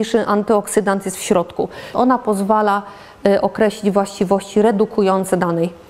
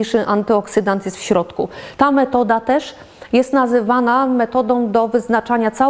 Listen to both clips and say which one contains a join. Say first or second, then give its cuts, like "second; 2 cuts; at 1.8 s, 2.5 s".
first; 1 cut; at 1.9 s